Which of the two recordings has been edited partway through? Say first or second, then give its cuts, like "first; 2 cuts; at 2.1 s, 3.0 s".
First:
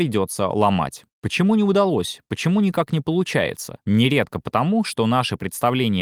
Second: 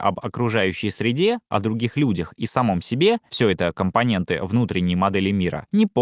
first; 1 cut; at 1.1 s